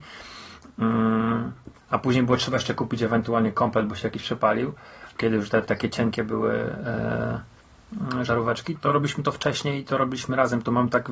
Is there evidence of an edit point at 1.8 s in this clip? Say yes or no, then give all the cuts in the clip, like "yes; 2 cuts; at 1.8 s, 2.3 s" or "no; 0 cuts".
no; 1 cut; at 5.6 s